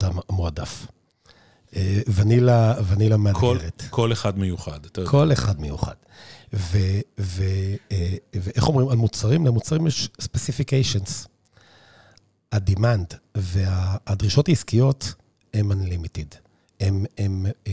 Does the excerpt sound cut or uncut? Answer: uncut